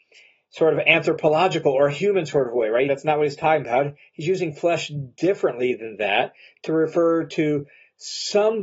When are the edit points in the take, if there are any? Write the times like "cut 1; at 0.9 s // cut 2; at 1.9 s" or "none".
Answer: cut 1; at 2.9 s

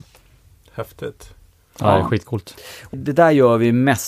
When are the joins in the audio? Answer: cut 1; at 2.9 s

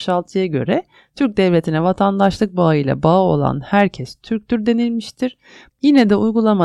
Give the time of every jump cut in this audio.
cut 1; at 5.7 s

